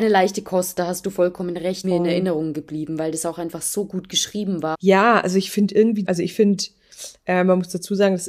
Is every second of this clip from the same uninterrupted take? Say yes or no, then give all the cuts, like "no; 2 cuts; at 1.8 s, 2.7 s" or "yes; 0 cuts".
no; 3 cuts; at 1.8 s, 4.7 s, 6.0 s